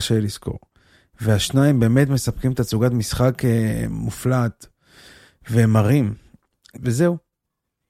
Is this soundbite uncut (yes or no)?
no